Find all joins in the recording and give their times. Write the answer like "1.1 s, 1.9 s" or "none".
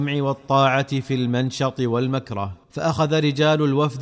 2.6 s